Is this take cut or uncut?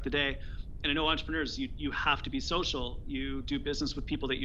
uncut